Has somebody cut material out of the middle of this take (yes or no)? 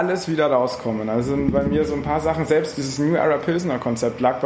no